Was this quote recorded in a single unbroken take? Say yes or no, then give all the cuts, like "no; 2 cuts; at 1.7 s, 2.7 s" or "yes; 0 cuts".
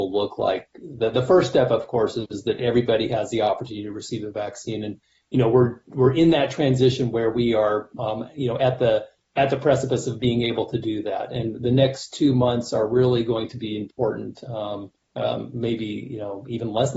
yes; 0 cuts